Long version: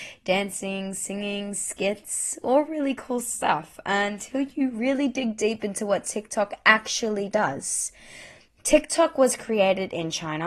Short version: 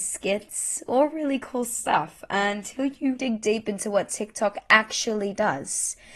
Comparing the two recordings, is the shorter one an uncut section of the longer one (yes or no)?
no